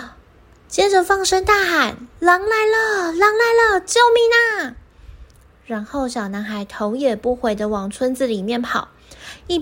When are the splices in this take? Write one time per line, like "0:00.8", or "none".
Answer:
none